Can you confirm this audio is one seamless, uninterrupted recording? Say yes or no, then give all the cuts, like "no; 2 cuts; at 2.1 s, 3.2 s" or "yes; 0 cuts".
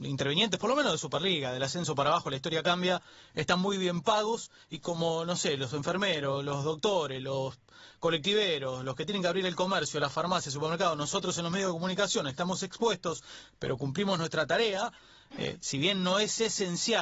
yes; 0 cuts